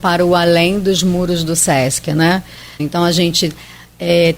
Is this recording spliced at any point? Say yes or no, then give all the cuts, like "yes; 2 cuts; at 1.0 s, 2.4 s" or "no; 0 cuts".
yes; 1 cut; at 2.8 s